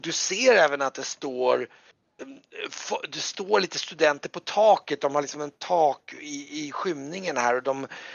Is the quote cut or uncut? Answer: uncut